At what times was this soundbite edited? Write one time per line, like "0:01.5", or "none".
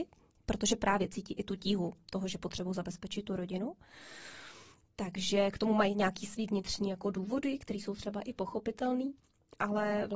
none

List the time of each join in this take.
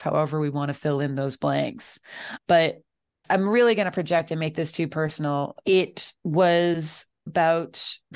0:05.6

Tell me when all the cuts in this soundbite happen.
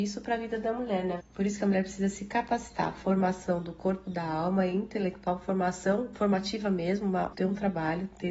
0:01.2
0:07.3

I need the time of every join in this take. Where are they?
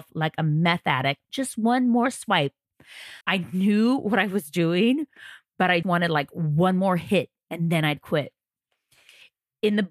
0:01.3
0:03.2
0:05.8

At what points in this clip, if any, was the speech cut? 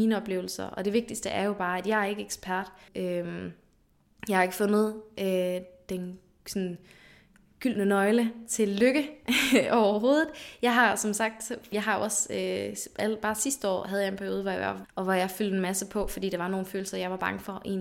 0:02.9
0:11.7
0:14.8

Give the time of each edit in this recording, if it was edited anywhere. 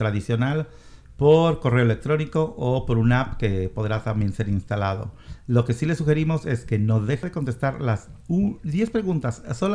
none

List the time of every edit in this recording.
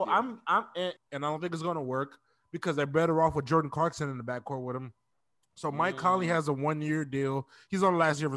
0:01.0

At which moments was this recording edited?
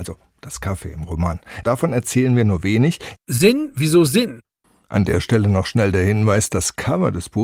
0:01.6
0:03.2

